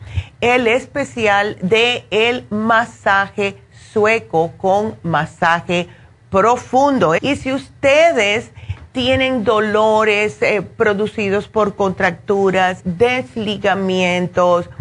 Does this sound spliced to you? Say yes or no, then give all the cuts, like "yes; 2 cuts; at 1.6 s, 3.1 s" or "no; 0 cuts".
yes; 2 cuts; at 7.2 s, 12.8 s